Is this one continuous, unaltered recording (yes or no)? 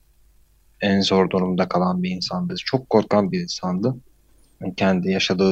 yes